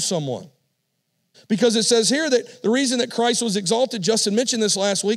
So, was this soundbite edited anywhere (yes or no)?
yes